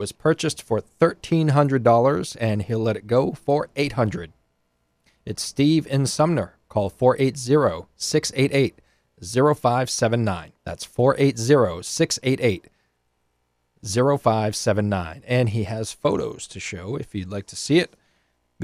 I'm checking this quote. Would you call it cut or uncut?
cut